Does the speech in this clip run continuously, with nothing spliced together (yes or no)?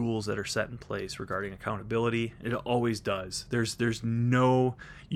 no